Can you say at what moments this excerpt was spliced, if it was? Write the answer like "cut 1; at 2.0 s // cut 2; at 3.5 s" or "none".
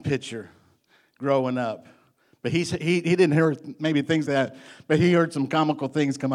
cut 1; at 4.3 s